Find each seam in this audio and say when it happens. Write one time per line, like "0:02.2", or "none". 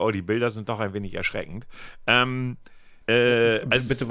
0:03.0